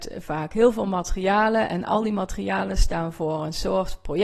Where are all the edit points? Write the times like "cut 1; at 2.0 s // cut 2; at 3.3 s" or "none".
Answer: none